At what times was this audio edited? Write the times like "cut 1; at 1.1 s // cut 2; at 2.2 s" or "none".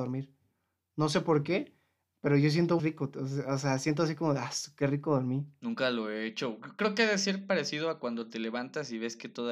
cut 1; at 2.8 s

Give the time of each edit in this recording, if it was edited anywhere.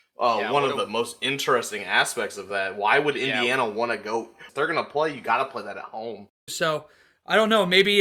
cut 1; at 4.5 s // cut 2; at 6.5 s

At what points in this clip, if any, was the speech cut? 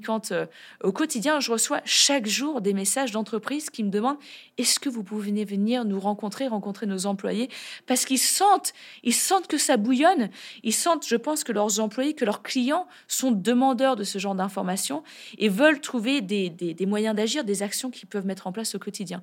none

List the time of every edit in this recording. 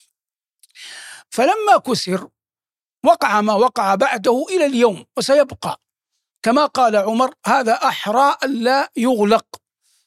cut 1; at 1.2 s

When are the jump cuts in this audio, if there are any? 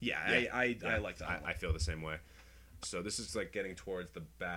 cut 1; at 1.4 s // cut 2; at 2.8 s

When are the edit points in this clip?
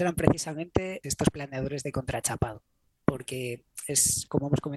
cut 1; at 1.0 s

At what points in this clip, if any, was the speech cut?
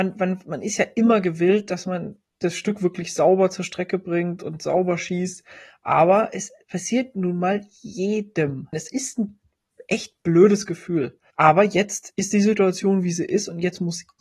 cut 1; at 8.7 s // cut 2; at 11.3 s

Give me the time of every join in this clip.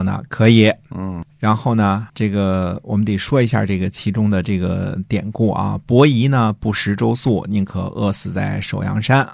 cut 1; at 2.1 s

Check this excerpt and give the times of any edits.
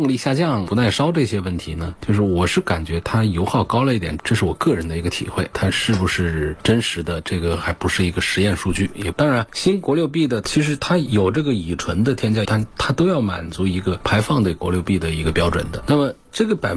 cut 1; at 9.1 s // cut 2; at 12.4 s

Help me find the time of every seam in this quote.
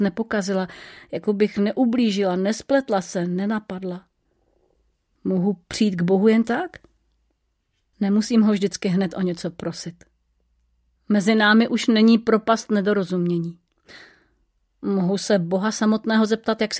none

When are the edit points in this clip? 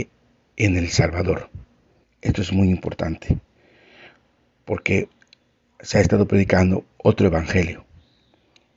cut 1; at 2.0 s

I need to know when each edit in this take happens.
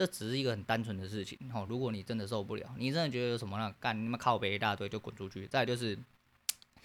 none

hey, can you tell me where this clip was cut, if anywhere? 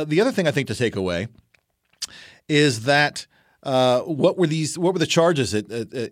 none

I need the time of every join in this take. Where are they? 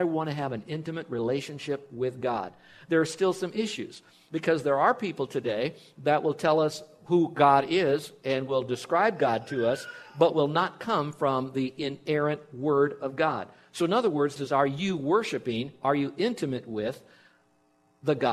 cut 1; at 14.4 s

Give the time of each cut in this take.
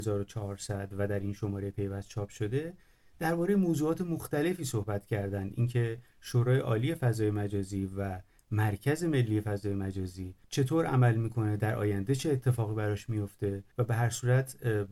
cut 1; at 10.4 s // cut 2; at 13.7 s

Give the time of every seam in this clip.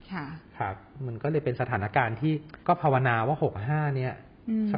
cut 1; at 2.6 s

